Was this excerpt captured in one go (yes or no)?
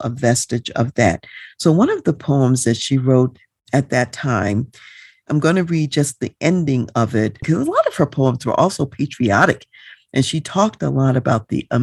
no